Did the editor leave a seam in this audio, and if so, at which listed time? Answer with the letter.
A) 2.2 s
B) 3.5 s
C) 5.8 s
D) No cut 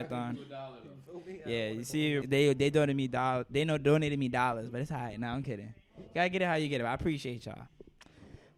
A